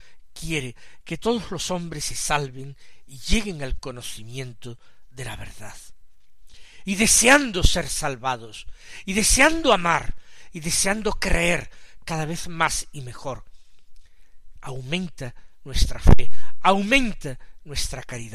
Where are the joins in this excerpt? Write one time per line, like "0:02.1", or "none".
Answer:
0:06.9